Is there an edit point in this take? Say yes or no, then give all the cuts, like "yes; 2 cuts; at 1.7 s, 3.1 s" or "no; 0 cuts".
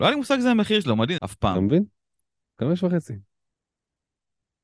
yes; 1 cut; at 1.2 s